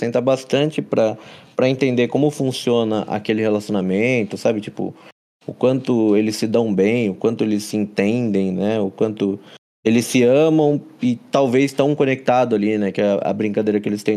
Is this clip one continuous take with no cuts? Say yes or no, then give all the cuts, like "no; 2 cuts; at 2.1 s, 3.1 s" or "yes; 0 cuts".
yes; 0 cuts